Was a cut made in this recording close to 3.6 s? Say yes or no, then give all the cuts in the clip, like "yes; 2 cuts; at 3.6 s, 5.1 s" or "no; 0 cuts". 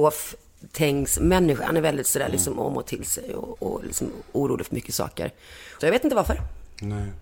yes; 2 cuts; at 3.6 s, 5.8 s